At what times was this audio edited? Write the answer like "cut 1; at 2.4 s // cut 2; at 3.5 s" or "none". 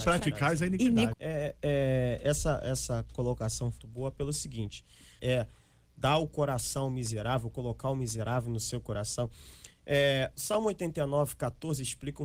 cut 1; at 1.1 s // cut 2; at 3.8 s // cut 3; at 5.2 s